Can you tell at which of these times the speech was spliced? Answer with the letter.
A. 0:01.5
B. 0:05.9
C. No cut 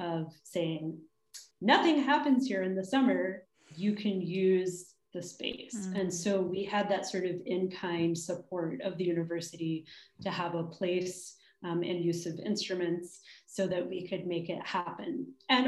A